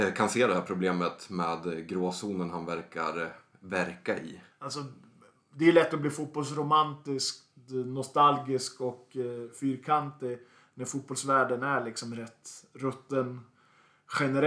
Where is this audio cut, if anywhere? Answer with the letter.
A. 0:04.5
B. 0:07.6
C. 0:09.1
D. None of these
A